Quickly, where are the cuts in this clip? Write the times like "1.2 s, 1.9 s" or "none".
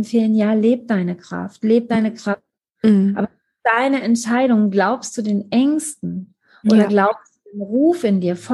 2.8 s